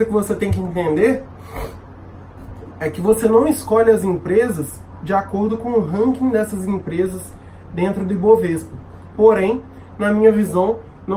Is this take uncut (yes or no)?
no